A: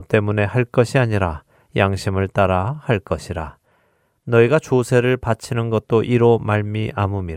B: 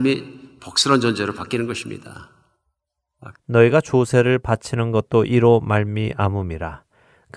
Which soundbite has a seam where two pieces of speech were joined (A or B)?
B